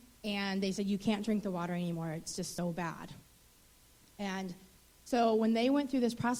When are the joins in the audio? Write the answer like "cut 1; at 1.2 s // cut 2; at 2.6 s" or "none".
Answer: none